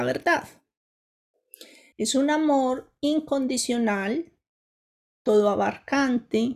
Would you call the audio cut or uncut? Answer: cut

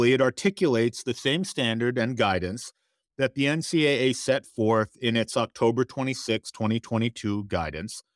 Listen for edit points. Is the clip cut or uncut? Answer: uncut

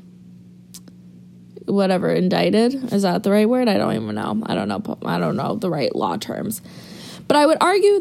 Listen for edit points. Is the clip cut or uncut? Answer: uncut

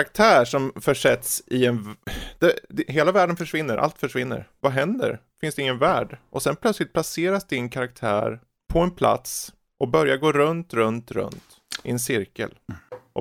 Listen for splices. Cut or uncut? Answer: uncut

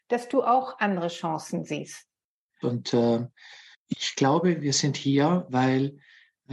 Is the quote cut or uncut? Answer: cut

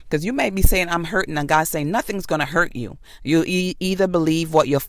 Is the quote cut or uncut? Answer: cut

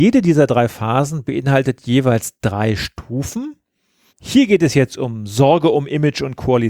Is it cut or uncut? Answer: cut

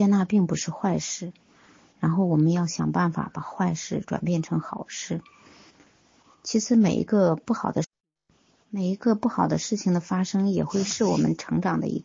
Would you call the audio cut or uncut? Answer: uncut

